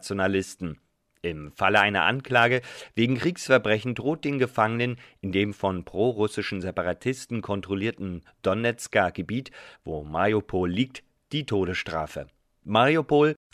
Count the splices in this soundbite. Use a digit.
0